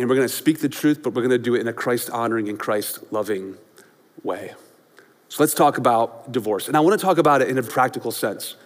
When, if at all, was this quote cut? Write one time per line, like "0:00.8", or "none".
0:07.7